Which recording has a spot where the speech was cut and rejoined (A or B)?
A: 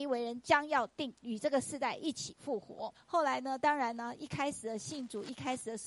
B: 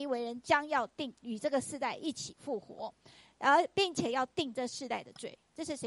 A